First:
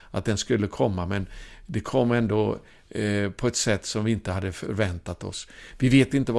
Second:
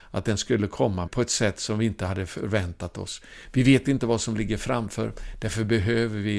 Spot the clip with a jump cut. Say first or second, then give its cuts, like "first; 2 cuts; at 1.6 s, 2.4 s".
second; 1 cut; at 1.1 s